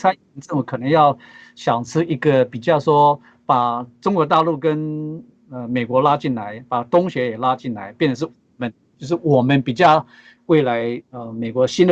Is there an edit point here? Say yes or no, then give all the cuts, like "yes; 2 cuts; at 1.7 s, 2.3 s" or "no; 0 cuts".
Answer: yes; 1 cut; at 10.4 s